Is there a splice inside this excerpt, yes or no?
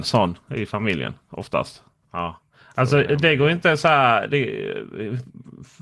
yes